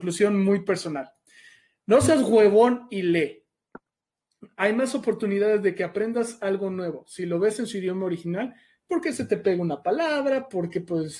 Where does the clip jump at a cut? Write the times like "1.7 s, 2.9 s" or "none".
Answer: none